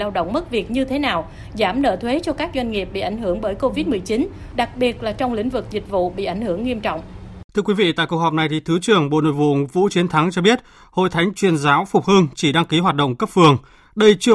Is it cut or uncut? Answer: cut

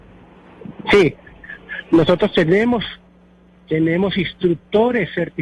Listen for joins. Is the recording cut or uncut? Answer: uncut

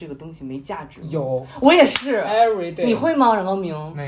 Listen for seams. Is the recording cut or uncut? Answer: uncut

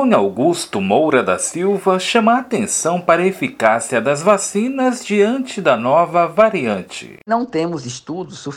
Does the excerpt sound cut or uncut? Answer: uncut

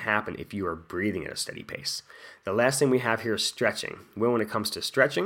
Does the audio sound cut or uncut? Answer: uncut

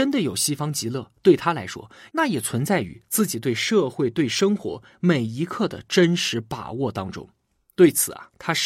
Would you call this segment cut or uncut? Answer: uncut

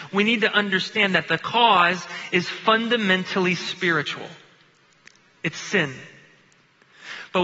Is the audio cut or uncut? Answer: uncut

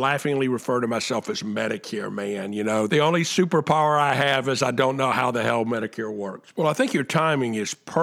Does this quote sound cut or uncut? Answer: cut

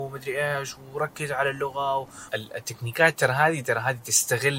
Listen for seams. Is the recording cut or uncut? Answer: cut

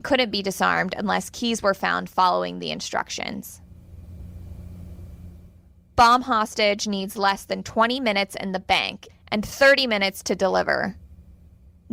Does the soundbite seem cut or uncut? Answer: cut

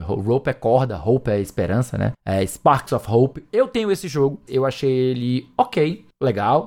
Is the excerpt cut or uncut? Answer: cut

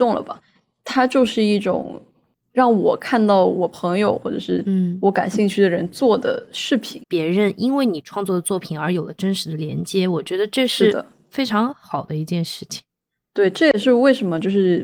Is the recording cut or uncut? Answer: cut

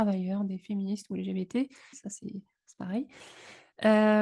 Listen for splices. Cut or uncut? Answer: cut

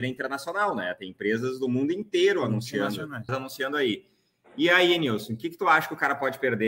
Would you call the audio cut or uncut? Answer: cut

